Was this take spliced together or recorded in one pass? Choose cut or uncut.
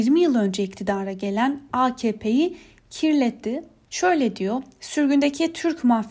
cut